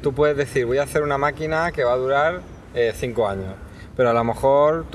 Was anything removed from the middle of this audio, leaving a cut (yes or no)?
no